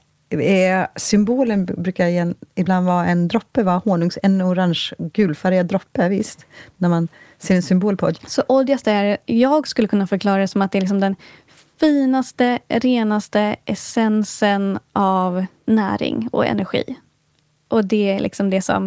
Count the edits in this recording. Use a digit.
1